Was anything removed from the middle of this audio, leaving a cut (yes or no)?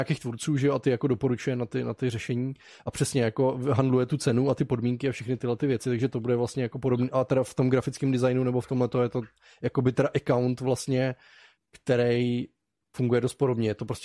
no